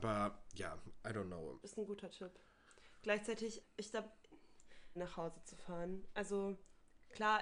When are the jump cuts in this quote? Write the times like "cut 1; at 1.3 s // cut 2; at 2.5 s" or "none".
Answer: cut 1; at 1.6 s // cut 2; at 3.6 s // cut 3; at 5.0 s